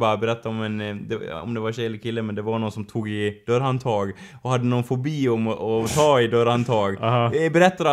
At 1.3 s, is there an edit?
no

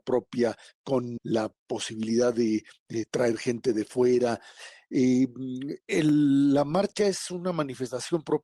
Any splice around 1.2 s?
yes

